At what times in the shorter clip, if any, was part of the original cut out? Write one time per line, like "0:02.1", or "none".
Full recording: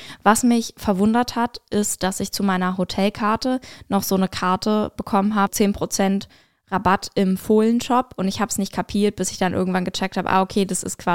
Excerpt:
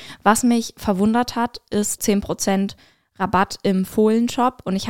0:02.0